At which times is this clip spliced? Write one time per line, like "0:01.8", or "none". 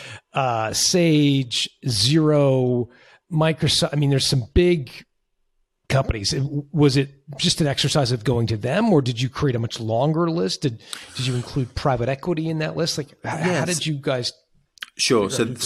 none